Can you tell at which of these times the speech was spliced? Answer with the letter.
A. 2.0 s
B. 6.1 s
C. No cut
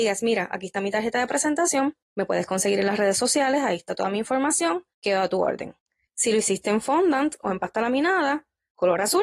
B